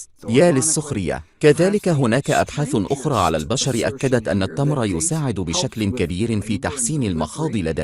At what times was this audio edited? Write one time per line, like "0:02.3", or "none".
0:01.3